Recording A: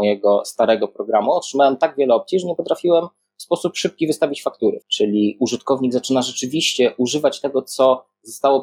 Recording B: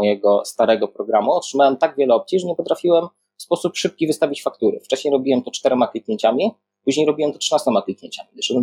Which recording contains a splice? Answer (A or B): A